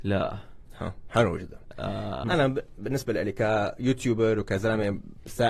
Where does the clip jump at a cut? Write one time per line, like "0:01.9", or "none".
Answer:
0:02.2